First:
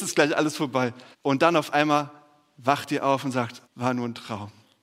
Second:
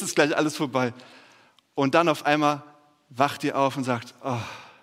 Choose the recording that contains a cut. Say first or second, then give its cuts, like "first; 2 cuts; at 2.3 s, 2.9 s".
first; 2 cuts; at 1.1 s, 3.6 s